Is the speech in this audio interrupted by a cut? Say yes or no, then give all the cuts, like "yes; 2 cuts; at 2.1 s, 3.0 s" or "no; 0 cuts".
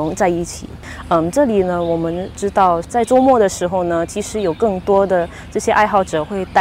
no; 0 cuts